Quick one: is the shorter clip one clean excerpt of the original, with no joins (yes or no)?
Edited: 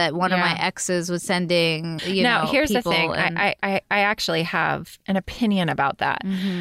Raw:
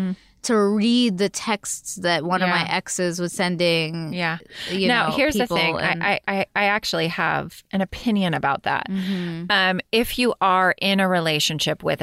no